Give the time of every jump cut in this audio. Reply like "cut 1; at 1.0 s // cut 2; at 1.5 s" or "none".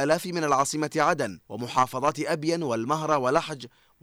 cut 1; at 1.4 s